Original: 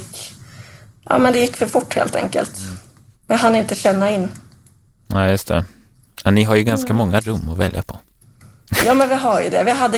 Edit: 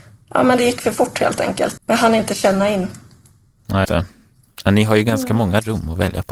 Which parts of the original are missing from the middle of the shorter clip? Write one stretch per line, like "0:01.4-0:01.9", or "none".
0:02.5-0:03.2
0:05.3-0:05.4